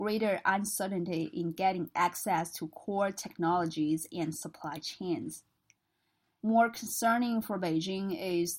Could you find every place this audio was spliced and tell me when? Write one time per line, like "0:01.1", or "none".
0:06.4

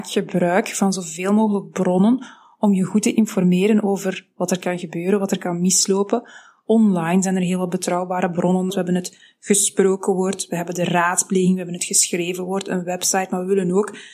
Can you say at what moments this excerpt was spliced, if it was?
0:08.7

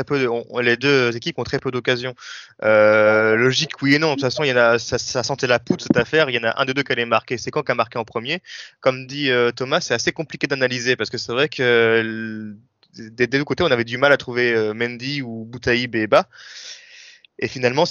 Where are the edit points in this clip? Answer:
none

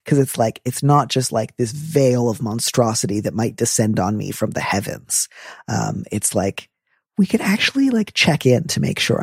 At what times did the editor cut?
none

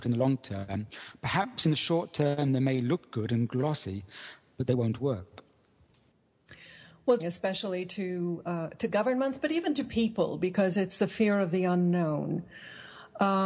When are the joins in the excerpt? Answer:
0:07.2

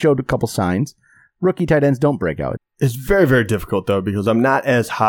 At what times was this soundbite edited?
0:02.6

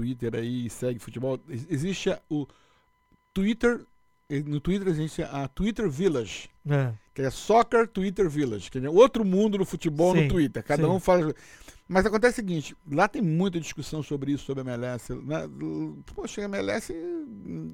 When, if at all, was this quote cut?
none

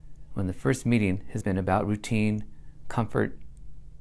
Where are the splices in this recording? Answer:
0:01.4

